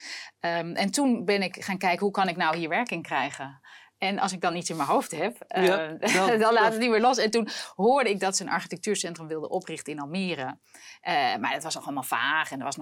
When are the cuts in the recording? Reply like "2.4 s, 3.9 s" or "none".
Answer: none